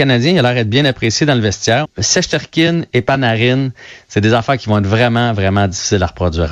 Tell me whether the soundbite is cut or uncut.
cut